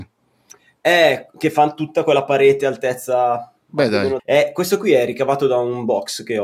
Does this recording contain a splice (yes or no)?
yes